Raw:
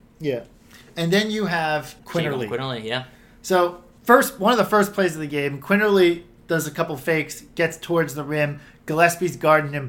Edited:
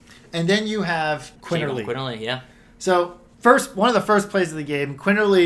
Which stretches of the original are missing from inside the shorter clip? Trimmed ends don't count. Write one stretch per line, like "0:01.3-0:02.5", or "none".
none